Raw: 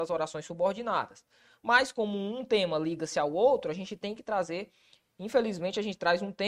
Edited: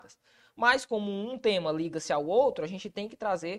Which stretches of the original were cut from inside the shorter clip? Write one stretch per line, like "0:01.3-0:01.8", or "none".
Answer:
none